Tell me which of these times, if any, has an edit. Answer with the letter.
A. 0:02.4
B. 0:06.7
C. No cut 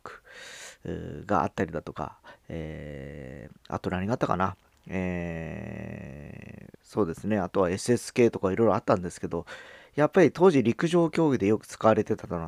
B